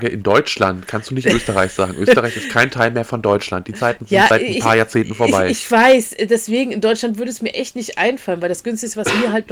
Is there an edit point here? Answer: no; 0 cuts

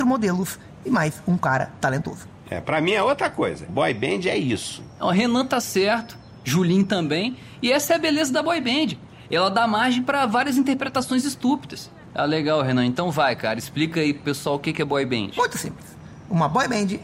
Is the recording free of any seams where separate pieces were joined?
no; 2 cuts; at 3.7 s, 12.1 s

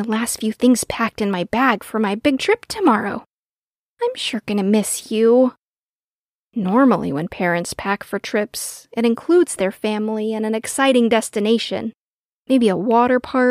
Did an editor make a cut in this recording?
no; 0 cuts

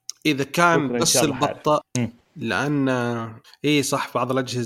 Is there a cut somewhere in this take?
yes; 1 cut; at 1.8 s

